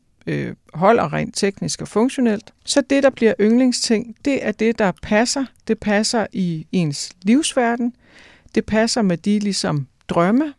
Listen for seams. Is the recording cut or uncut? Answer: uncut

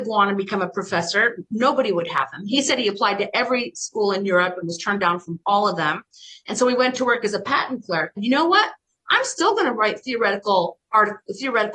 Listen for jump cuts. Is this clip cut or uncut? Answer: cut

